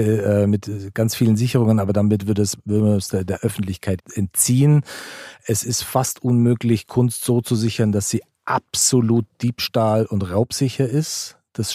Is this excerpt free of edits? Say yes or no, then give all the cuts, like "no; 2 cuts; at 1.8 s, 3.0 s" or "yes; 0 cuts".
yes; 0 cuts